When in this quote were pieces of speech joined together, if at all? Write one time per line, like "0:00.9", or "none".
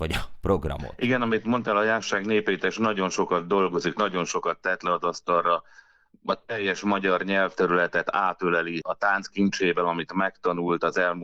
none